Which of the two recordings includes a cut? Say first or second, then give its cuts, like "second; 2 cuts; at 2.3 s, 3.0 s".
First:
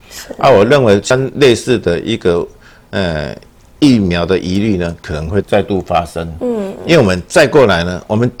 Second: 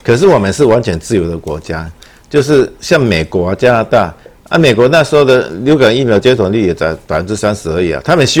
first; 1 cut; at 5.4 s